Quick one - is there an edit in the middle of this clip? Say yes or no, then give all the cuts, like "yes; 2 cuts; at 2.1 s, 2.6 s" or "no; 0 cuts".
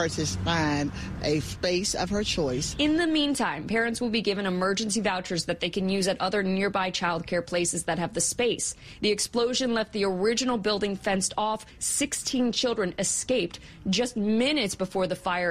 no; 0 cuts